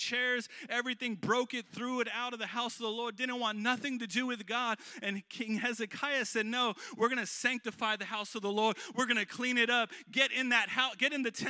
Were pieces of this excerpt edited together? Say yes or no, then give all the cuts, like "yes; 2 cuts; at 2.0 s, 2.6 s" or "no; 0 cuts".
no; 0 cuts